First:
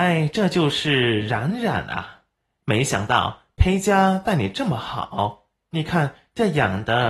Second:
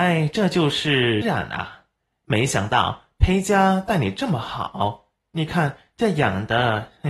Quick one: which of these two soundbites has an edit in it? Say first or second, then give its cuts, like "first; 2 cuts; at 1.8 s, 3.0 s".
second; 1 cut; at 1.2 s